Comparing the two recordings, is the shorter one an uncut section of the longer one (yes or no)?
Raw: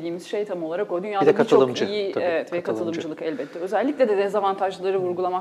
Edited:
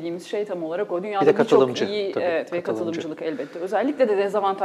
yes